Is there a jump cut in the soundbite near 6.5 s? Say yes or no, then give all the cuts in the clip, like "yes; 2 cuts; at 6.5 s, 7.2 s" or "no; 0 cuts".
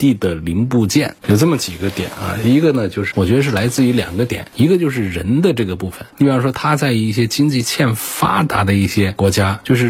no; 2 cuts; at 1.2 s, 3.1 s